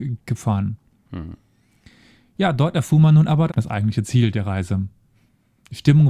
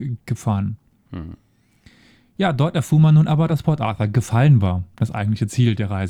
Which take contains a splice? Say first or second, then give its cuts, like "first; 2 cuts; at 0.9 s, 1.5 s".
first; 1 cut; at 3.5 s